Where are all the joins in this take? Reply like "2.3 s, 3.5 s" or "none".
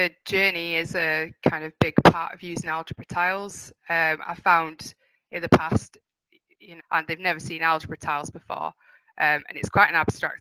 6.8 s